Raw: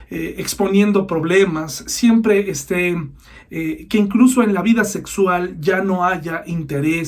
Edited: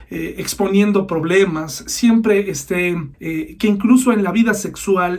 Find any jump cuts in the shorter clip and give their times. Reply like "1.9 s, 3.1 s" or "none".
3.1 s